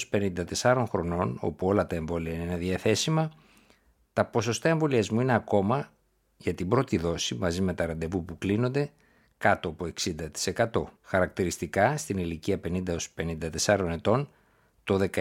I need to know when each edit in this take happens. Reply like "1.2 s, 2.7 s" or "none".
11.0 s